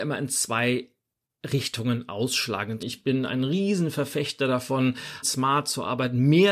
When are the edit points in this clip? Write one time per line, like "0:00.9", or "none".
0:02.8
0:05.2